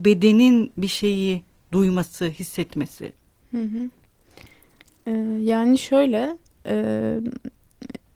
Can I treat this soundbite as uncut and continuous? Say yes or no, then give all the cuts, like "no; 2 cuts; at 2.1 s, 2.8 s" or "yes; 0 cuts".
yes; 0 cuts